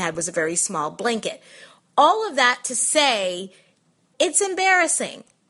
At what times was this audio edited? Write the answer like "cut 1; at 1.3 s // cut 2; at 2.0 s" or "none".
cut 1; at 4.1 s